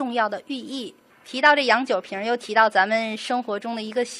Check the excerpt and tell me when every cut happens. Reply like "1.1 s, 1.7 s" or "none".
1.1 s